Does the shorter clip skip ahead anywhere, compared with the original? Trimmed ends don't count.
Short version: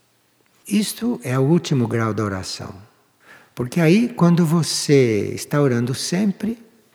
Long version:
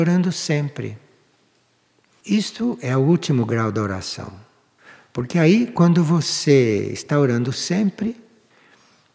no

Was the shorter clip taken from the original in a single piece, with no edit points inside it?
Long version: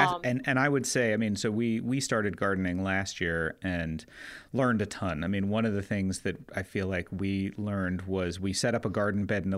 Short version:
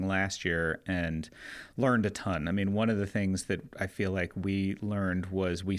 yes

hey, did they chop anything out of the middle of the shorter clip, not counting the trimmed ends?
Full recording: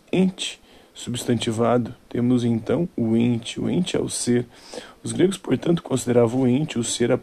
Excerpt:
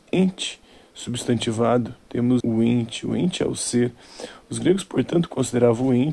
yes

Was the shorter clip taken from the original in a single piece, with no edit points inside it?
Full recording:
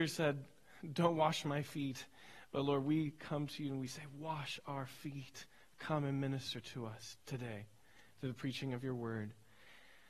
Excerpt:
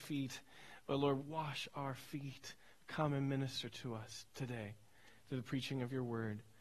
no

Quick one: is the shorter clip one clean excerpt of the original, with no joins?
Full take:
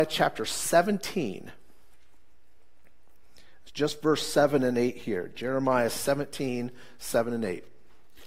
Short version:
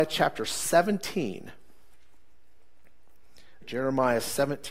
no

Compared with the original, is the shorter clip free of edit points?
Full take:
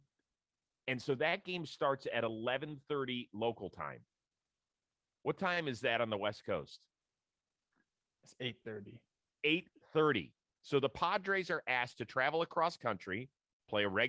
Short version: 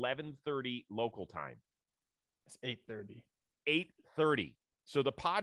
no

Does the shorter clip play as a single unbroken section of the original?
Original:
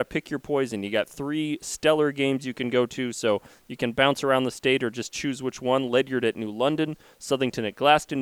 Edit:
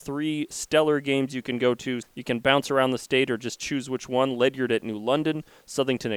no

